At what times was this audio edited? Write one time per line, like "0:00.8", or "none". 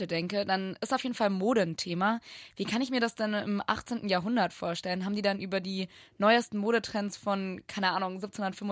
none